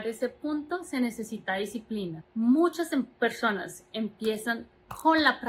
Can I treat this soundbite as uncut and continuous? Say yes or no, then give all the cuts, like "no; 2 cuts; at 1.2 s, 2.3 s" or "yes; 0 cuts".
no; 1 cut; at 2.2 s